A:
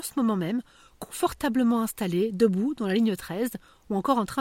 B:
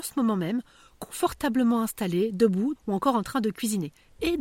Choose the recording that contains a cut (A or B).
B